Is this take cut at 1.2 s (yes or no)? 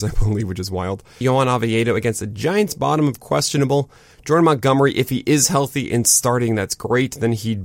yes